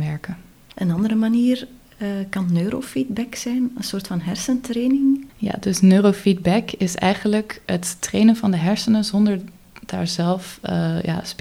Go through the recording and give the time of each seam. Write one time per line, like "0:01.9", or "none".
0:05.3

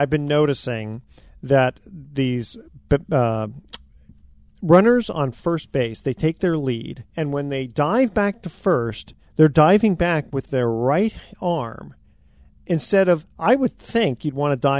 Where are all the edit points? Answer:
0:07.1

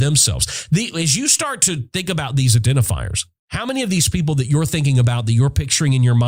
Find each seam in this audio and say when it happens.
0:03.4

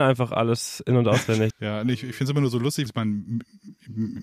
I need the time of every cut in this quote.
0:01.5
0:02.9

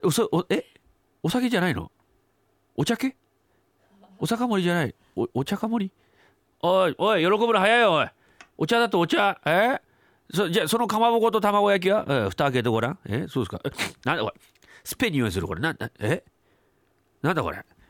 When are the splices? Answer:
0:07.0

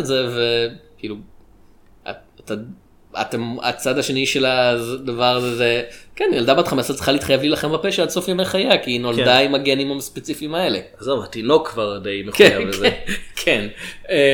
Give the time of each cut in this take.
none

